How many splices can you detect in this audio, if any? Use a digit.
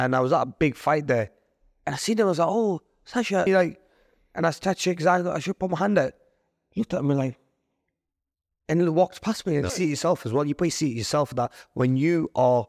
2